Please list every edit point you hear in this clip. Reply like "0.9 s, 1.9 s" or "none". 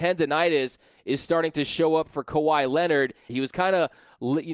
3.3 s